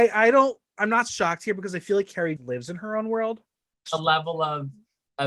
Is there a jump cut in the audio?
yes; 2 cuts; at 2.4 s, 3.9 s

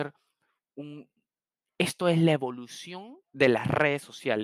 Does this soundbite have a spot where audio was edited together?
yes; 1 cut; at 3.2 s

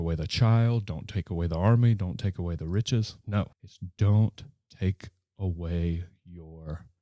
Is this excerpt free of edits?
no; 1 cut; at 3.5 s

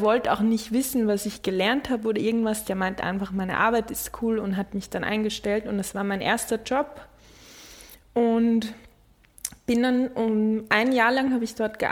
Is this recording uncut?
yes; 0 cuts

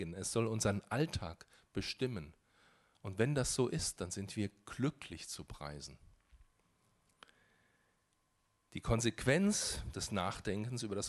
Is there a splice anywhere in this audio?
no; 0 cuts

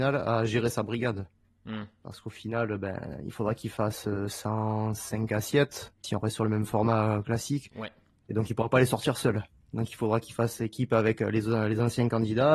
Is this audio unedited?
no; 1 cut; at 6.0 s

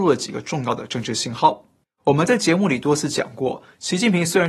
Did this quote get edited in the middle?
yes; 1 cut; at 1.8 s

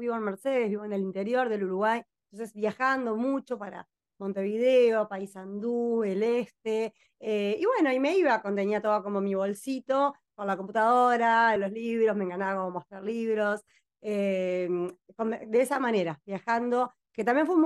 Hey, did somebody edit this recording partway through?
yes; 1 cut; at 11.6 s

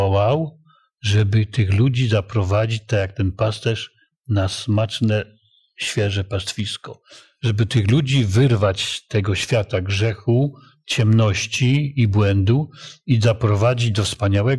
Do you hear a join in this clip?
no; 0 cuts

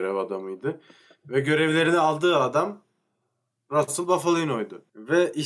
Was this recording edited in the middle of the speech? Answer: no; 0 cuts

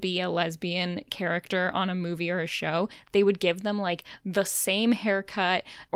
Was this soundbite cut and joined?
no; 0 cuts

